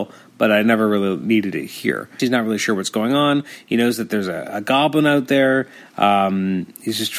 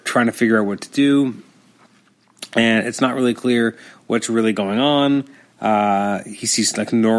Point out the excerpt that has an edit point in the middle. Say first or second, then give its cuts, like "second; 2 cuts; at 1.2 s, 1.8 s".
first; 1 cut; at 2.2 s